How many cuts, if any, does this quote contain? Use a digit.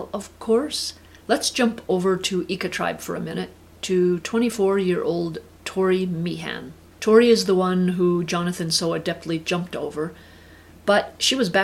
1